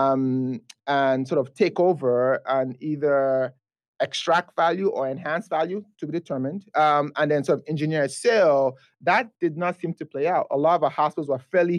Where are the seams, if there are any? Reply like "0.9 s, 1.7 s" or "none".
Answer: none